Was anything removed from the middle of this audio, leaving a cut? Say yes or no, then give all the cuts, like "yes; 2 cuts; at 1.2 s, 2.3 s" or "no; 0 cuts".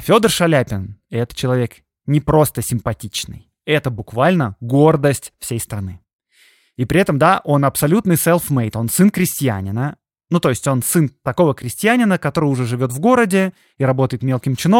no; 0 cuts